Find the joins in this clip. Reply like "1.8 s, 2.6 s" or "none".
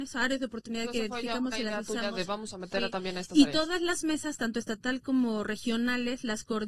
none

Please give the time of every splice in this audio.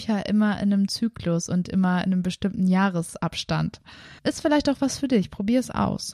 4.2 s

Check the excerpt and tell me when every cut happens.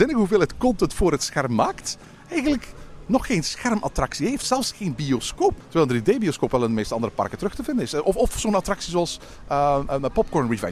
none

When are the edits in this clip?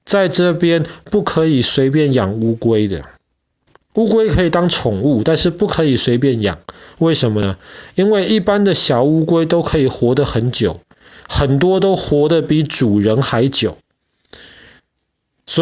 none

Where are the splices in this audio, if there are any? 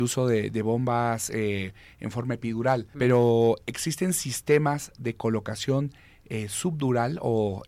2.9 s

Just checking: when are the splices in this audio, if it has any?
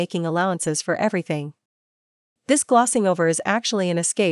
none

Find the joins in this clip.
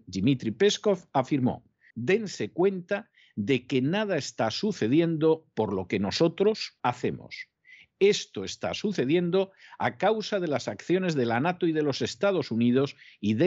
1.9 s, 6.8 s

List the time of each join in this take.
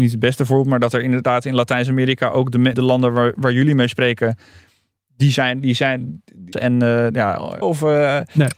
2.7 s, 6.5 s, 7.6 s

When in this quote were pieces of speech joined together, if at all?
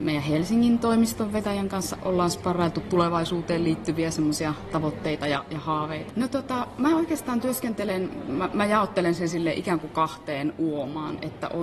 6.1 s

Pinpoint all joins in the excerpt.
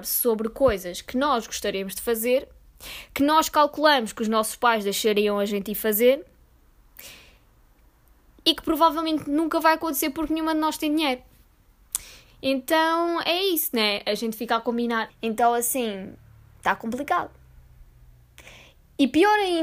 15.1 s

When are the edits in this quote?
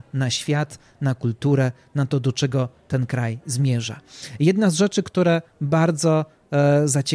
none

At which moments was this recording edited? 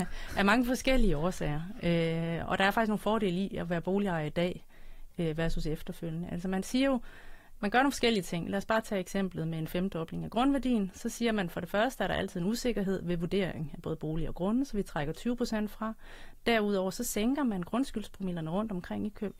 none

